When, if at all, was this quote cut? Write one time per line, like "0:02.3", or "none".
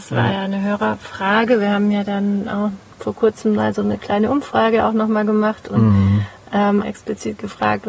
0:06.8